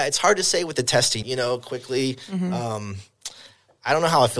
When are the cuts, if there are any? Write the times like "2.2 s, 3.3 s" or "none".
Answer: 1.2 s